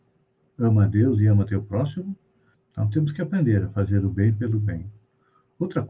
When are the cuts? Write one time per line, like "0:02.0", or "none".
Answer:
0:02.5